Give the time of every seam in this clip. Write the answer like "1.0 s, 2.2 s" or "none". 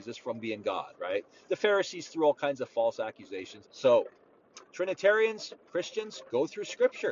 3.6 s

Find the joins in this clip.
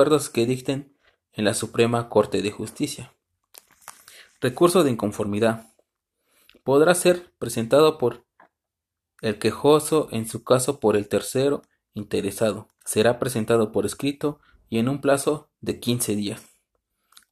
12.8 s, 15.5 s

